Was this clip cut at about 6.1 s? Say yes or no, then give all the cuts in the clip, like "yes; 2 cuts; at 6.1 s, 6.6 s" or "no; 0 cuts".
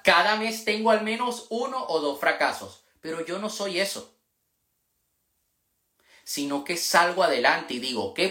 no; 0 cuts